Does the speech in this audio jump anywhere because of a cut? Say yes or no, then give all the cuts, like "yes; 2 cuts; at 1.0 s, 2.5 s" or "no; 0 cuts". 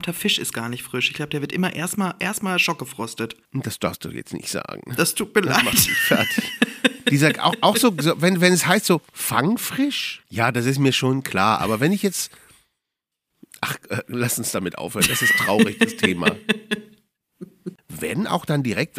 yes; 2 cuts; at 10.2 s, 17.8 s